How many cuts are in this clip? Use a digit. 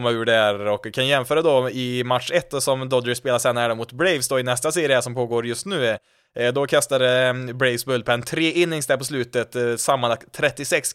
0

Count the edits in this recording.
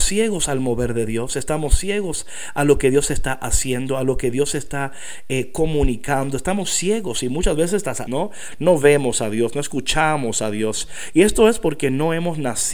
1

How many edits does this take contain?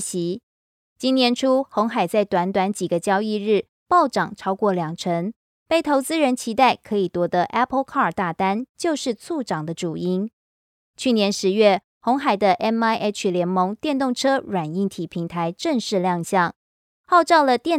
1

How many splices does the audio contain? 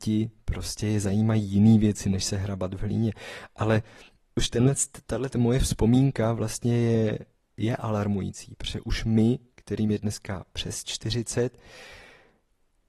1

